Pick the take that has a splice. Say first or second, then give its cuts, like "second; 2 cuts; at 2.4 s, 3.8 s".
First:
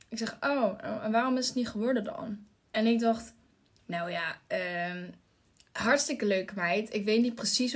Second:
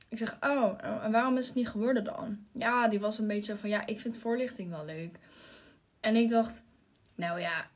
first; 1 cut; at 2.5 s